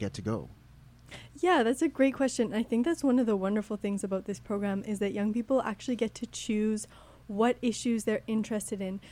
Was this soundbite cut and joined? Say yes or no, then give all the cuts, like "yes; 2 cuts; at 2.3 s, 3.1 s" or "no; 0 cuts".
no; 0 cuts